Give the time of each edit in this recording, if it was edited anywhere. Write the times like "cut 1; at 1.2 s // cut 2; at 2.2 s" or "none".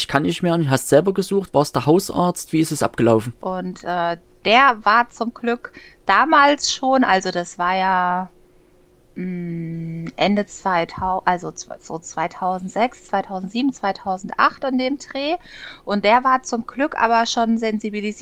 cut 1; at 3.4 s